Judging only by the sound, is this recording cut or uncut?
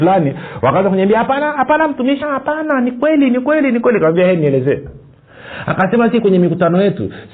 cut